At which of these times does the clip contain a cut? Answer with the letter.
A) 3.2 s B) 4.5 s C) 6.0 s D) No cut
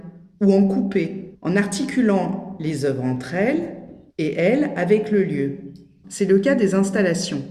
C